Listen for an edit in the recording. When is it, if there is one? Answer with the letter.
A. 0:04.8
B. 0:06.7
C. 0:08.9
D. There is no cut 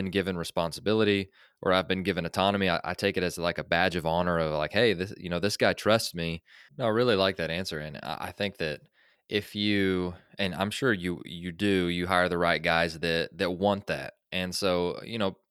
B